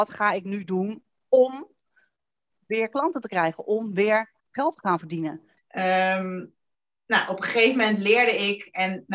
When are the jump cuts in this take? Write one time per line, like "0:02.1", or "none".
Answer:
0:04.4
0:05.6